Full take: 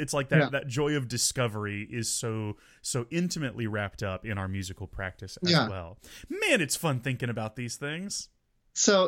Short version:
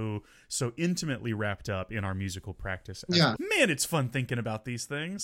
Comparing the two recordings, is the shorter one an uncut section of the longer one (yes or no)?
no